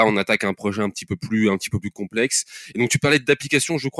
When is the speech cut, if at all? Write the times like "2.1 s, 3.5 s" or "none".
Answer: none